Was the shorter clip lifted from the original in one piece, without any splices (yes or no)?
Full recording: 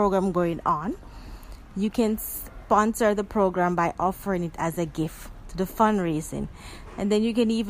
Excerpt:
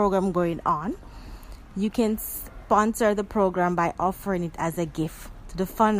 yes